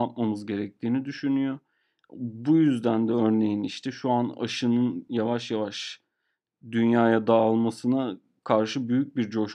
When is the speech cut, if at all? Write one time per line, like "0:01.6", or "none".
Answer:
none